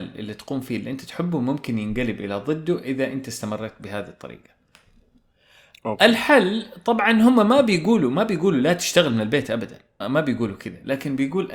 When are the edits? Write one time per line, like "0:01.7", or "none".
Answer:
0:10.0